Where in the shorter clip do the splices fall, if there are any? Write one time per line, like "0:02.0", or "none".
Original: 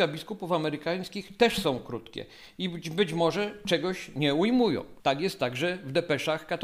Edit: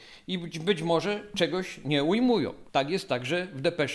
none